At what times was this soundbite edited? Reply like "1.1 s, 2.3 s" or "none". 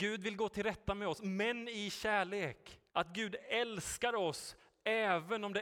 2.9 s

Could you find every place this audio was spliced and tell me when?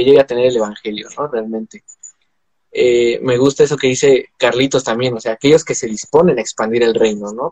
none

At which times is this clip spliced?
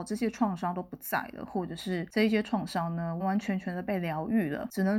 3.2 s

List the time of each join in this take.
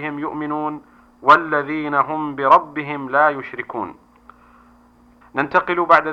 5.2 s

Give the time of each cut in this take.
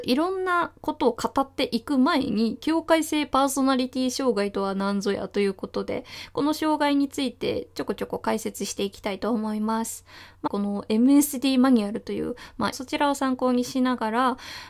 10.5 s, 12.7 s

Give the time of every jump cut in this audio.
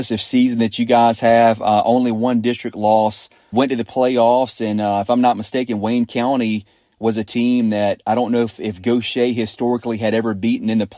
3.5 s

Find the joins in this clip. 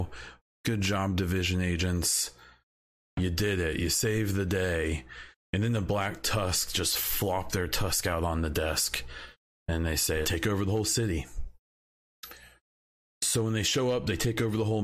10.2 s

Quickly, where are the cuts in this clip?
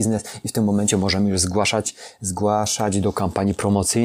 none

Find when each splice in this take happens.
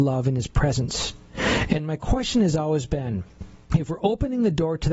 3.6 s

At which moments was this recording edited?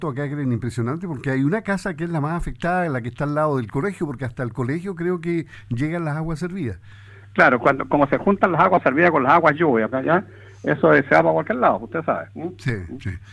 7.6 s, 9.9 s

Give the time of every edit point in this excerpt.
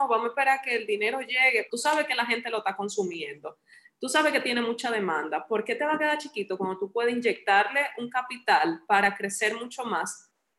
1.7 s

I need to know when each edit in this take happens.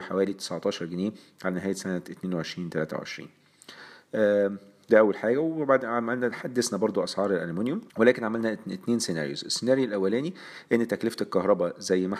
7.9 s

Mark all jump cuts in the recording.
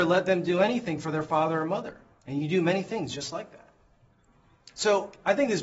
2.1 s

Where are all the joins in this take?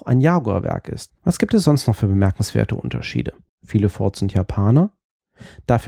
1.1 s, 3.5 s

